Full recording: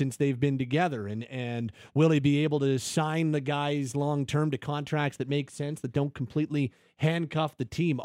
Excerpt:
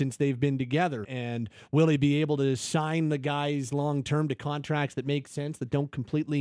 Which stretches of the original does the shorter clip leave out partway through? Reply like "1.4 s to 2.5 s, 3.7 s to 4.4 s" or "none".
1.0 s to 1.3 s